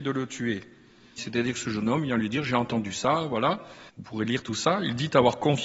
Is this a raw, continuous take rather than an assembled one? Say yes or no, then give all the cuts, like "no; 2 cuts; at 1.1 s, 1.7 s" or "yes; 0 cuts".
no; 2 cuts; at 1.2 s, 3.9 s